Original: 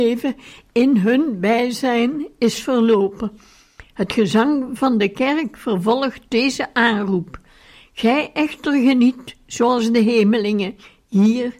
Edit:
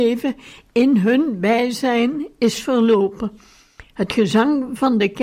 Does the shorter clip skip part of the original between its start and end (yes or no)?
no